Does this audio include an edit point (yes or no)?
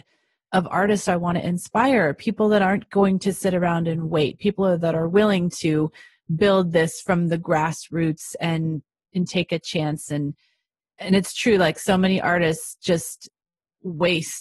no